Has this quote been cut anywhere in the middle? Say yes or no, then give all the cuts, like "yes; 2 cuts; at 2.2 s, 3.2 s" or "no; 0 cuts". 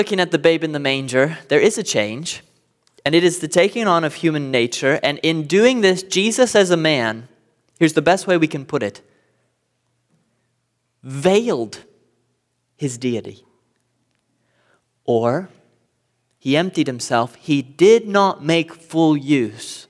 no; 0 cuts